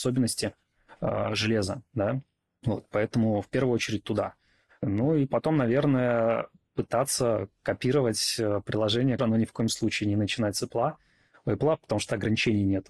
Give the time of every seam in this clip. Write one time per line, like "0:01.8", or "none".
0:09.2